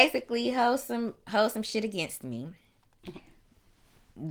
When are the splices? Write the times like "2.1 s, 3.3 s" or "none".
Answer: 3.0 s